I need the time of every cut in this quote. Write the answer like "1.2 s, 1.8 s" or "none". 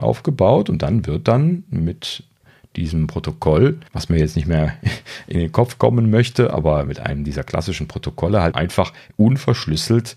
3.9 s, 8.5 s